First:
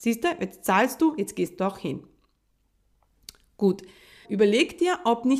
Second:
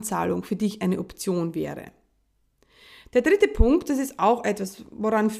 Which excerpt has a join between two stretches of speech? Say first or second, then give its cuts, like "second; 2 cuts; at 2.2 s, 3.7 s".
first; 1 cut; at 4.2 s